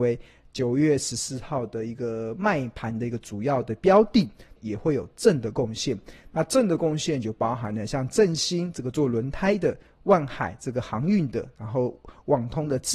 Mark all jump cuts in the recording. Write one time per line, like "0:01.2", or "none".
0:04.6